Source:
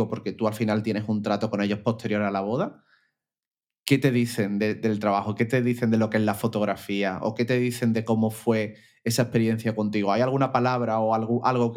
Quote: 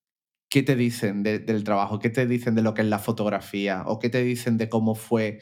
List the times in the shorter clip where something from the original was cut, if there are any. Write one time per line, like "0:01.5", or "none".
none